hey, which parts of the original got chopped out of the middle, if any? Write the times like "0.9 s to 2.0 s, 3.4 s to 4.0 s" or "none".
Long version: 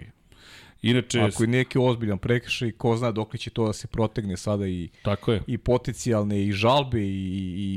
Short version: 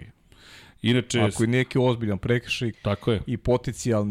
2.7 s to 4.9 s